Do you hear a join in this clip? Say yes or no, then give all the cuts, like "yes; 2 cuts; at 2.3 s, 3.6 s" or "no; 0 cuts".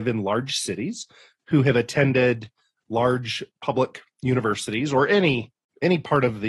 no; 0 cuts